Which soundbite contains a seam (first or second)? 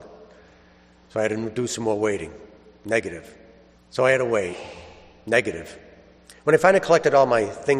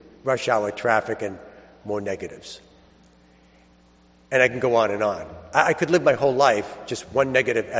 first